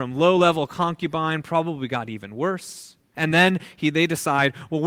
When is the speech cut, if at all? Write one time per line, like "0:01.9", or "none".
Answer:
0:03.1